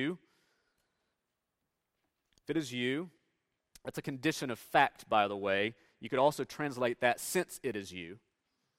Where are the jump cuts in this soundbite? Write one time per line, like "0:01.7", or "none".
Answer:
none